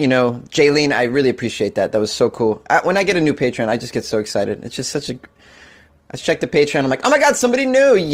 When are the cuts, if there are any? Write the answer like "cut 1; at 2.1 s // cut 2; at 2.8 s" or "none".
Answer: none